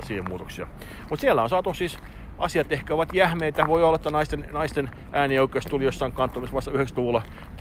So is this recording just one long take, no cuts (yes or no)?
yes